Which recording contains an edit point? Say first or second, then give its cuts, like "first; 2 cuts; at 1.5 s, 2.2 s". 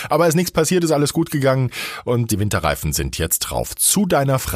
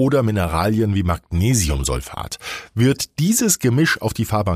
first; 1 cut; at 2.3 s